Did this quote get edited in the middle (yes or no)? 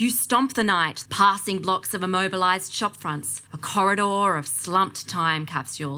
yes